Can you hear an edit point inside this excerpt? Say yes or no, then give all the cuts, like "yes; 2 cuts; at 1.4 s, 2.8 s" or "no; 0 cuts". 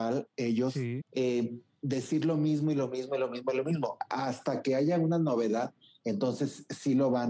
yes; 1 cut; at 1.0 s